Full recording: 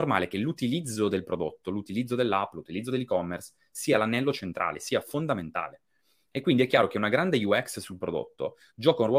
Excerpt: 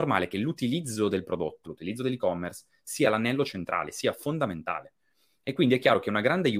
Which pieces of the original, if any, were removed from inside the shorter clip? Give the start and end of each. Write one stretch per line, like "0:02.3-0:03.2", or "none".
0:01.6-0:02.5